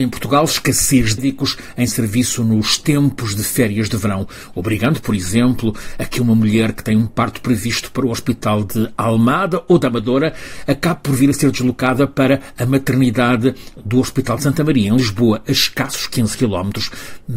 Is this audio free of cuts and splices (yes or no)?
no